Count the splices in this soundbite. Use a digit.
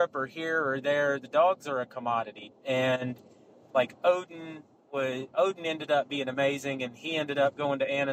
1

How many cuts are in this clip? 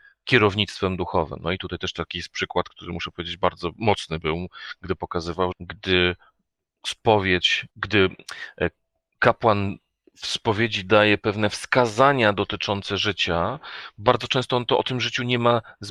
2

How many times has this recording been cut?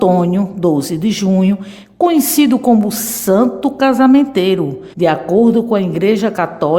1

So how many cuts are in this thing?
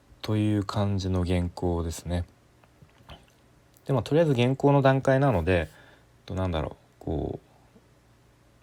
0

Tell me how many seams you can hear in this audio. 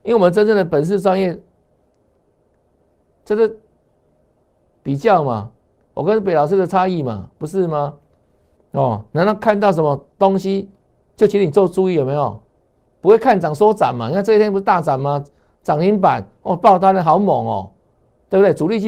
1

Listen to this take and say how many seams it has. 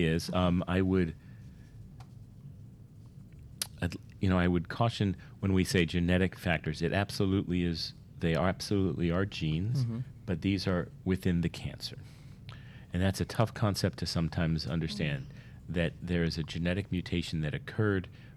0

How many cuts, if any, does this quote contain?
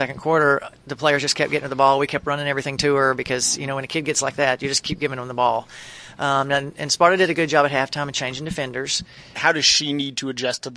1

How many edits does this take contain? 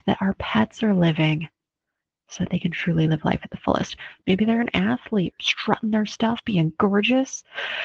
2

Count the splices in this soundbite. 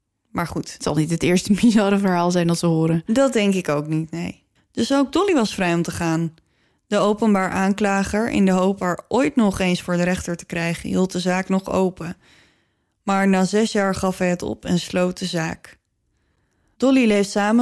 1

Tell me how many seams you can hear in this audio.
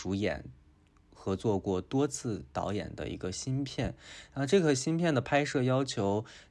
0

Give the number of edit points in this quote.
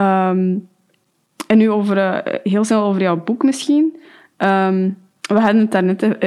0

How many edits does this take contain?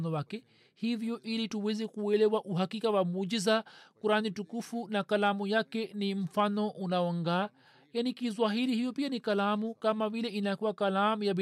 0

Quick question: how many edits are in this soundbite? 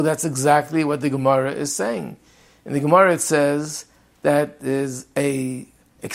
0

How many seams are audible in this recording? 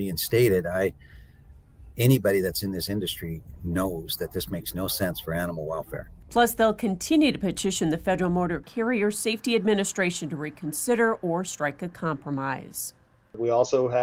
0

